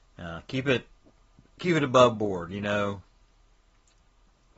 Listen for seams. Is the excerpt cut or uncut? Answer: uncut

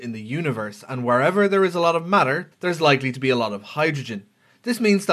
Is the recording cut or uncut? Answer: cut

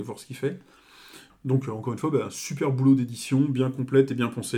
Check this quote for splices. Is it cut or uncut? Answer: cut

